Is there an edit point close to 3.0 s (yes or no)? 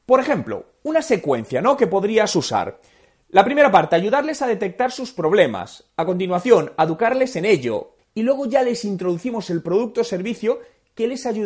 no